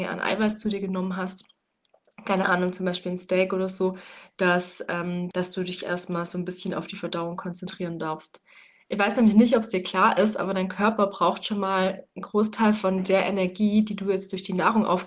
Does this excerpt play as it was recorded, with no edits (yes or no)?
no